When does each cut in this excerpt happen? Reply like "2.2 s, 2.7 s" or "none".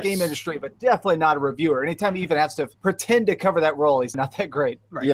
2.7 s, 4.1 s